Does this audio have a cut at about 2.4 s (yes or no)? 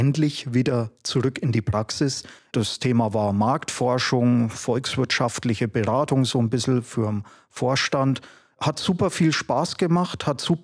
yes